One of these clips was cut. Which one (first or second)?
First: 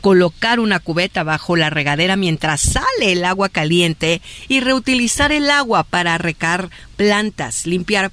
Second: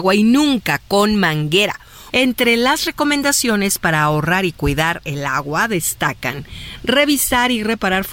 second